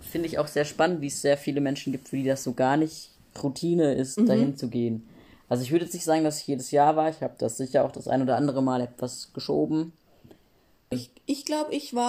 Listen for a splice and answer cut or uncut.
cut